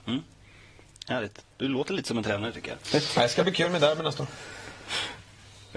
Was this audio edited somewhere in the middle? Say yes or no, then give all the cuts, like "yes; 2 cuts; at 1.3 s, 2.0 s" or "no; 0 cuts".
yes; 1 cut; at 1.4 s